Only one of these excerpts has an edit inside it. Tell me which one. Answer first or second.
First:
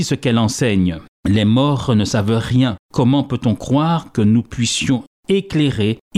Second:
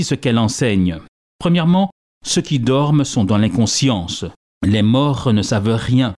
first